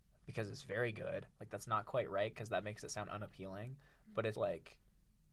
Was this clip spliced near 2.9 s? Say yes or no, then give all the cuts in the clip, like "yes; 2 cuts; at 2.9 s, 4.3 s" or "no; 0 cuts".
no; 2 cuts; at 1.3 s, 4.3 s